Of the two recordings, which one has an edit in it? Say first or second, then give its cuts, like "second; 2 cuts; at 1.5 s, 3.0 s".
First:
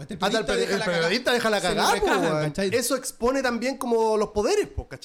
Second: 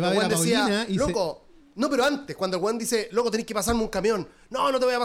first; 1 cut; at 2.7 s